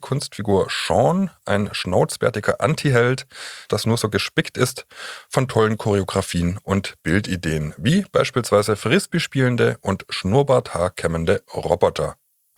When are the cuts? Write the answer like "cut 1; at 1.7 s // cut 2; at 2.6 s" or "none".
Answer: cut 1; at 3.7 s